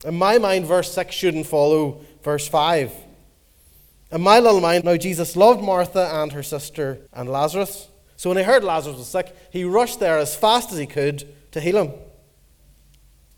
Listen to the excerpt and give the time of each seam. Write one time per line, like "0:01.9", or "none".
0:04.8
0:07.1